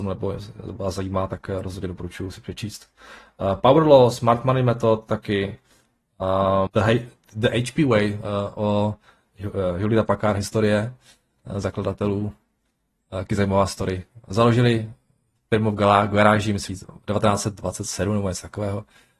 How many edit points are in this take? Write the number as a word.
two